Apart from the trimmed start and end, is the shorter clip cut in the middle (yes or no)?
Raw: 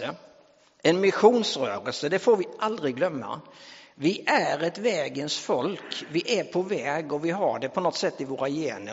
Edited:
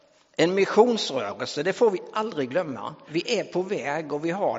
yes